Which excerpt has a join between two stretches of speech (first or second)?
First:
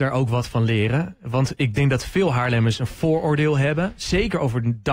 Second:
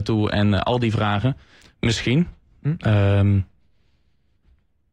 second